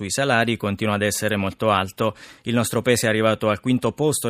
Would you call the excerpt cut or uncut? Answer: uncut